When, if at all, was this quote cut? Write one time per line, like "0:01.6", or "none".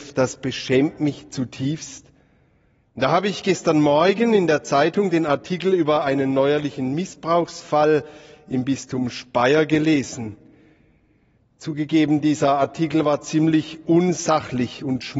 0:02.8